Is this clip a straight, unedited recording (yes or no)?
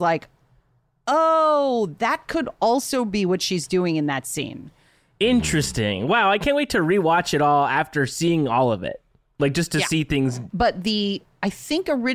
no